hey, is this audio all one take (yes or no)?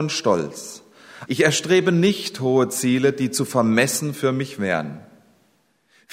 no